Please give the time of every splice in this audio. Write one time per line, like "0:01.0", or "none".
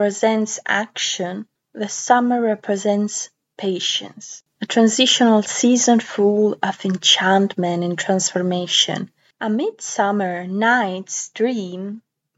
none